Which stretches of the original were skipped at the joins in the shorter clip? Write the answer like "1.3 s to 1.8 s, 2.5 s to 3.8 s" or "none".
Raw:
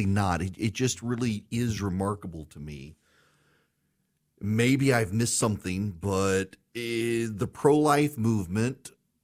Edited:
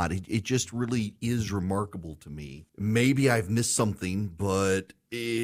3.0 s to 4.3 s